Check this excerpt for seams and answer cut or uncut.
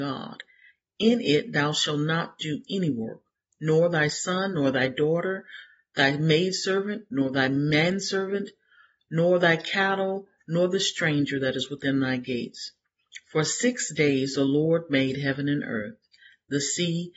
uncut